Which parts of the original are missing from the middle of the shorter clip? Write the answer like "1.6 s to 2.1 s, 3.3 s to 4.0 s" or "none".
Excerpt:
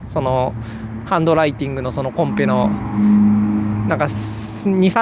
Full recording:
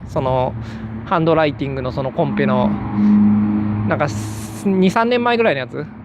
none